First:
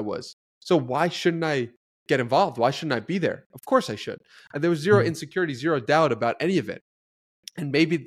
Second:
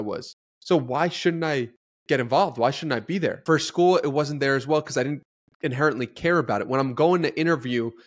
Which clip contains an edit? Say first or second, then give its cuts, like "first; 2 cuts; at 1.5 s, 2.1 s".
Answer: second; 1 cut; at 3.5 s